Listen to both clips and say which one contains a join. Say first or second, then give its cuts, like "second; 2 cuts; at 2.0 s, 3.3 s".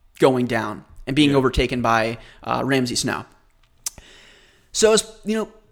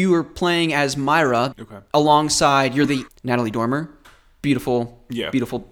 second; 2 cuts; at 1.5 s, 3.1 s